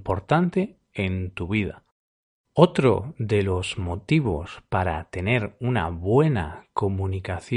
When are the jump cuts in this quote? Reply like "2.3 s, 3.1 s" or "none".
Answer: none